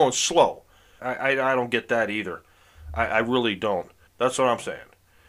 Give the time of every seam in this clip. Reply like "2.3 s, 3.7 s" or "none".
1.0 s, 4.1 s